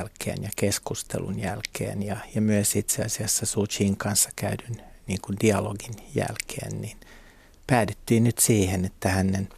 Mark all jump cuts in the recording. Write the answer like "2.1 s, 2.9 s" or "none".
none